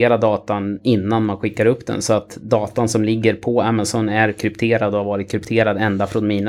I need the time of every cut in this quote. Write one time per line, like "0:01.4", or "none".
none